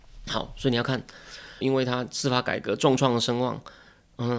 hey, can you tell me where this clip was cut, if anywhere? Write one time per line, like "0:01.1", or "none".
0:01.6